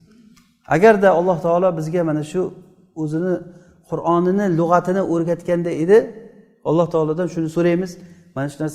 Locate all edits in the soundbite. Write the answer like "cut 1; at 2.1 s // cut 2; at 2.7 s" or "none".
none